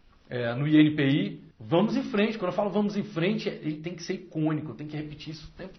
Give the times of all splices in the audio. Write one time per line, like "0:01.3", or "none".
0:01.5